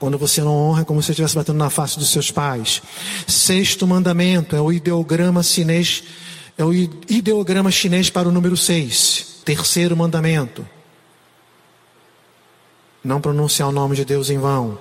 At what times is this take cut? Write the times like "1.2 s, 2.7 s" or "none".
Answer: 9.4 s